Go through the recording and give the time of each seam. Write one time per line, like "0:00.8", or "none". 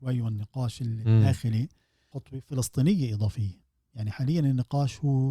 0:02.1